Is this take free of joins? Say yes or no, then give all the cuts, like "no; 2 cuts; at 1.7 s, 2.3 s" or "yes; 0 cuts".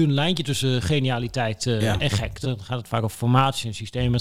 no; 1 cut; at 2.4 s